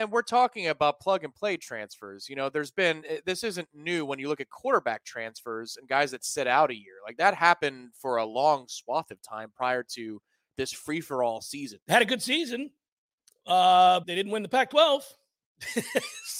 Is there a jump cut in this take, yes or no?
yes